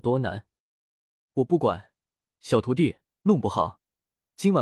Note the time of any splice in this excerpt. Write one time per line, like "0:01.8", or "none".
0:01.3
0:03.2